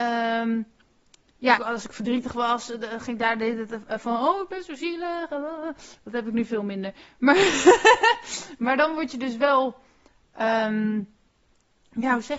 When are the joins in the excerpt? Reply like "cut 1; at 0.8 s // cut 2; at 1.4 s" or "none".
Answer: cut 1; at 1.6 s